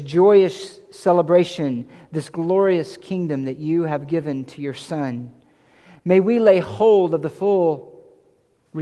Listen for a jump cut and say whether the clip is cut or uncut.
uncut